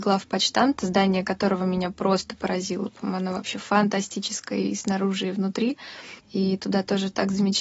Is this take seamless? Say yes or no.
no